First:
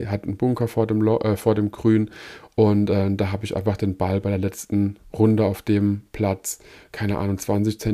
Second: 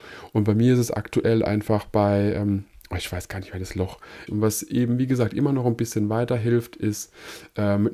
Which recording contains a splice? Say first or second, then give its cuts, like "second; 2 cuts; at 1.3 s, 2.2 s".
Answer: second; 1 cut; at 4.3 s